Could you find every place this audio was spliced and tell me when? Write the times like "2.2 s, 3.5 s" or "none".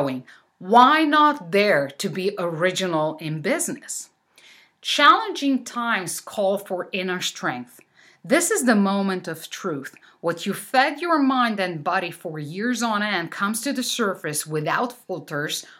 none